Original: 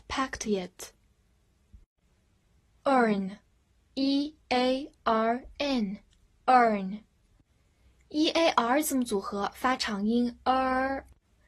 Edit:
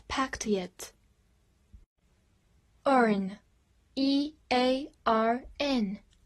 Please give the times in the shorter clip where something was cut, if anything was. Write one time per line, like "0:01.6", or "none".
none